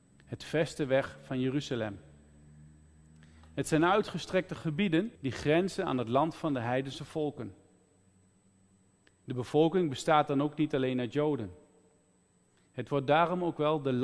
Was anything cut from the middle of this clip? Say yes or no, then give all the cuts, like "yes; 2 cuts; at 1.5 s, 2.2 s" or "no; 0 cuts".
yes; 1 cut; at 5.2 s